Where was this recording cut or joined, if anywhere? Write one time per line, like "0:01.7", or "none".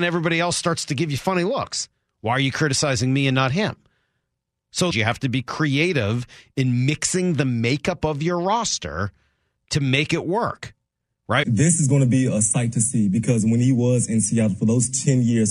0:04.9
0:11.4